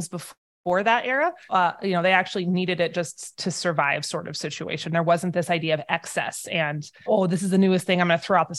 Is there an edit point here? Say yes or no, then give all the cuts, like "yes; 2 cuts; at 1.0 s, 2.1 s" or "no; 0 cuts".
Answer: yes; 2 cuts; at 1.5 s, 7.1 s